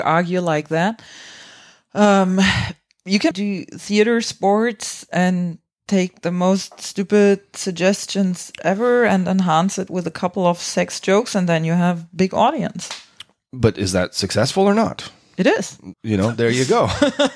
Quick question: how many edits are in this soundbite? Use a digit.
2